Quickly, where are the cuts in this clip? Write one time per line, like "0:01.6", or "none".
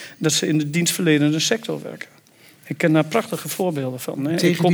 none